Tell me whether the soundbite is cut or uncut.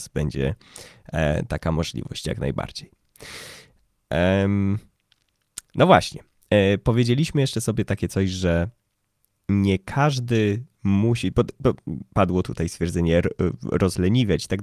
uncut